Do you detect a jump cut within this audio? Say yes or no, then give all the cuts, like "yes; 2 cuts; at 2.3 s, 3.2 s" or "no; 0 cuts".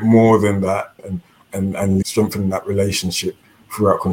yes; 2 cuts; at 1.0 s, 2.0 s